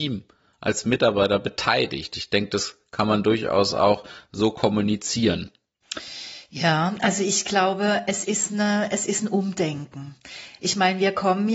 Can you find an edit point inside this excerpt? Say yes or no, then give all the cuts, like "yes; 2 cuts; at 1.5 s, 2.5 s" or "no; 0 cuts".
no; 0 cuts